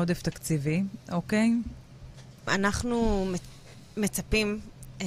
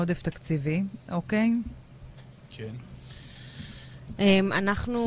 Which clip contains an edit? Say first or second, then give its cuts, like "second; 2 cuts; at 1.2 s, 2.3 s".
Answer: first; 1 cut; at 2.5 s